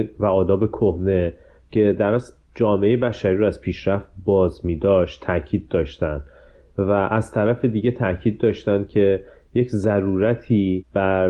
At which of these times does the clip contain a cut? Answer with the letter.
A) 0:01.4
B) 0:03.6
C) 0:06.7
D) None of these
D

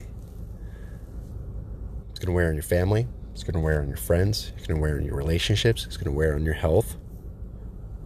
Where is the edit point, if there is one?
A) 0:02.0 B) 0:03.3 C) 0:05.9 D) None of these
A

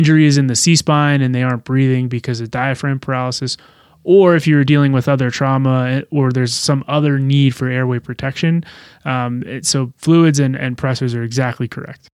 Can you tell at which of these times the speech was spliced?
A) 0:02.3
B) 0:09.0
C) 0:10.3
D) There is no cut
D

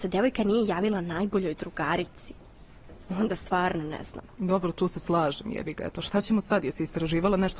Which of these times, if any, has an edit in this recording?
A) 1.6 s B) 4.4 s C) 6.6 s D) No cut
D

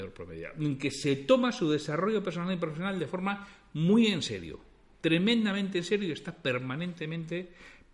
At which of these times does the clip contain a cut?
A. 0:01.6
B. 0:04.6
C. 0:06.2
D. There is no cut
D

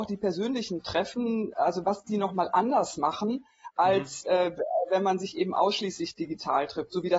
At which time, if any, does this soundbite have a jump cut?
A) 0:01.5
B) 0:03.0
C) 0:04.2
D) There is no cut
A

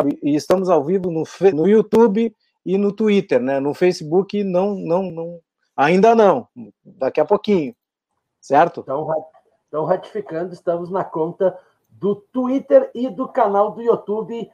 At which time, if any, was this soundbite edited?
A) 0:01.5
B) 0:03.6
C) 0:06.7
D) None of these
A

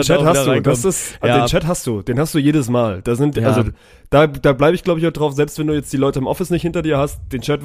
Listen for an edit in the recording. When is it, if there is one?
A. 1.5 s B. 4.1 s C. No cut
C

